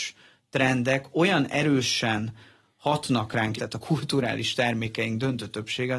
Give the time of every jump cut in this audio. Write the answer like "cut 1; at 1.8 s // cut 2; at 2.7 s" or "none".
cut 1; at 3.6 s